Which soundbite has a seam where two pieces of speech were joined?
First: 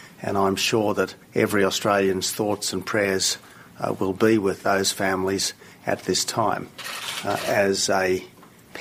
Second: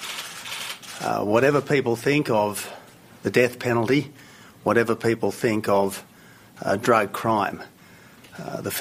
first; 1 cut; at 1.2 s

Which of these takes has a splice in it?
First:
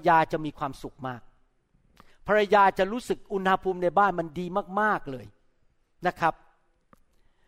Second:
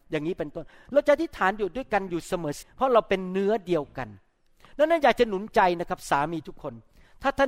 second; 1 cut; at 2.6 s

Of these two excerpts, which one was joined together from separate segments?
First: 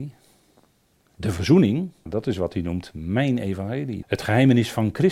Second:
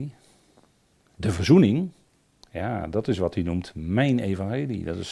first; 2 cuts; at 2.1 s, 4.0 s

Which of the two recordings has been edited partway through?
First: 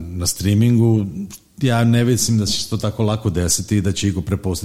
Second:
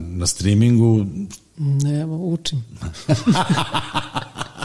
second; 1 cut; at 1.5 s

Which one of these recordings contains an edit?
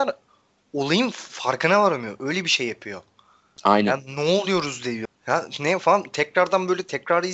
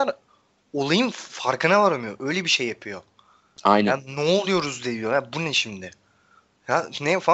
first; 1 cut; at 5.1 s

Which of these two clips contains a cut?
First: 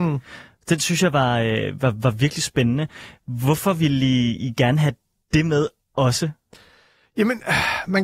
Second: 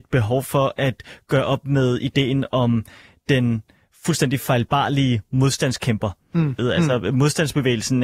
second; 1 cut; at 6.6 s

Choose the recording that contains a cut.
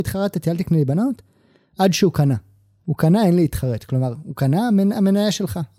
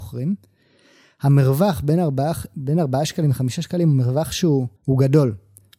second; 1 cut; at 4.8 s

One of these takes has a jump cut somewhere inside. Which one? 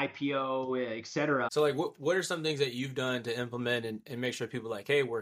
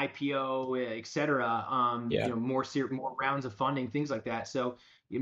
first; 1 cut; at 1.5 s

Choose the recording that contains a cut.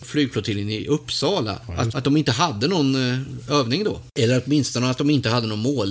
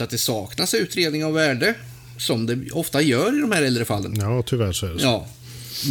first; 1 cut; at 1.9 s

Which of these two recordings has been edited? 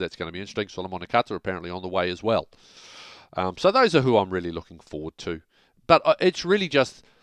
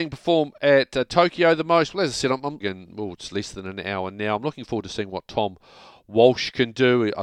second; 1 cut; at 2.6 s

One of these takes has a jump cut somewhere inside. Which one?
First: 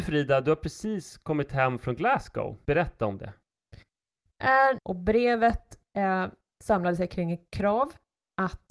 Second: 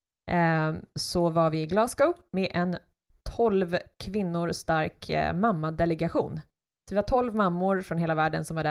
first; 2 cuts; at 2.6 s, 4.8 s

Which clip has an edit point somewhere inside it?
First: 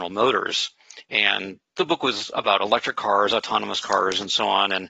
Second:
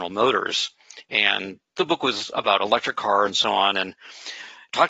second; 1 cut; at 3.3 s

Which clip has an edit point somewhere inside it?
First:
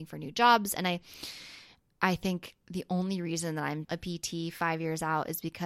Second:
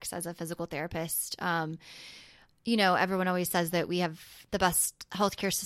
first; 1 cut; at 3.8 s

